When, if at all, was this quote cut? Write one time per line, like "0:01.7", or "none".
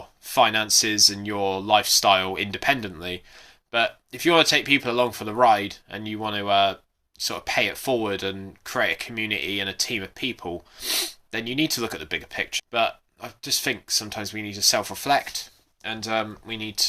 0:12.6